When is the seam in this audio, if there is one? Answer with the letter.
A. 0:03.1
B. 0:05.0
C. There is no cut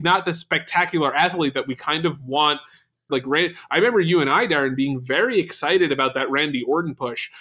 A